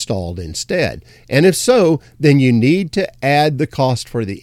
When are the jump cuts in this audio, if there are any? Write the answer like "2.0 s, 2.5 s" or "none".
none